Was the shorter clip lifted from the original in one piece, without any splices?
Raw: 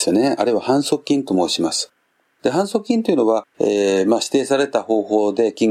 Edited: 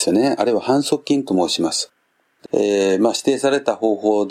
no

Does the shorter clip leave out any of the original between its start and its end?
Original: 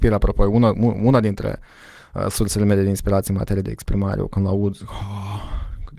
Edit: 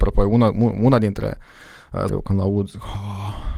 yes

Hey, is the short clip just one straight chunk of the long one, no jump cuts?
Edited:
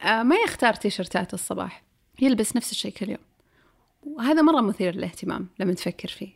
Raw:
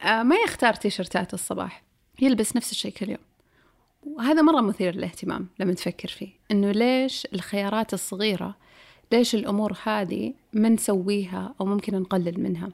yes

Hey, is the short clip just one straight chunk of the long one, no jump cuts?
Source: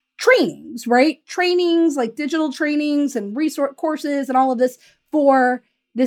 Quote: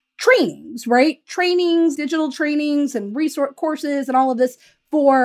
no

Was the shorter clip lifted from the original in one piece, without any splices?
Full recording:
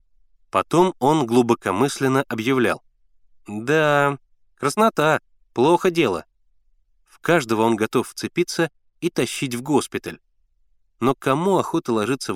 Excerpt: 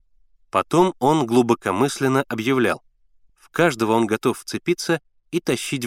no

